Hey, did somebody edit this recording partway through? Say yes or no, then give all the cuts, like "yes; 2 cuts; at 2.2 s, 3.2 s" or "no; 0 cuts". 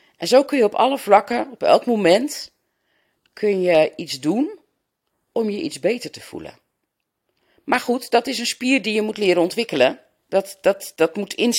no; 0 cuts